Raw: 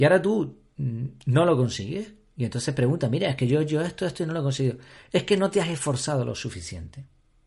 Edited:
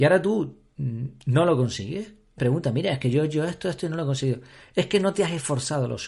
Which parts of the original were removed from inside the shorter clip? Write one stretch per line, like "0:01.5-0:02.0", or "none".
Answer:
0:02.4-0:02.7